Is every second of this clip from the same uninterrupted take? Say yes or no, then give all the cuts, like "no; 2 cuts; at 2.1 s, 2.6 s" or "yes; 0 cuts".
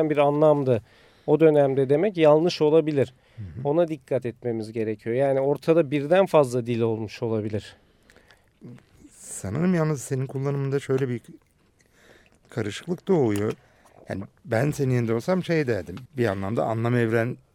no; 1 cut; at 16.1 s